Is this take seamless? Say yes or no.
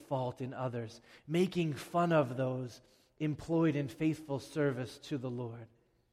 yes